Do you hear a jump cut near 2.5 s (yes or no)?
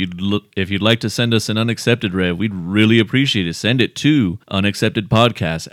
no